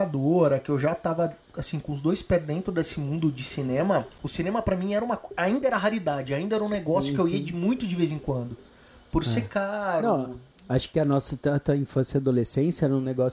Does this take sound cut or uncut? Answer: uncut